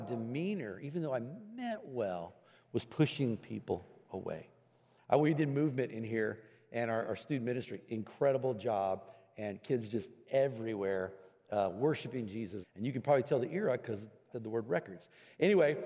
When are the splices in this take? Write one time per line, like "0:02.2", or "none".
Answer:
0:12.6
0:14.3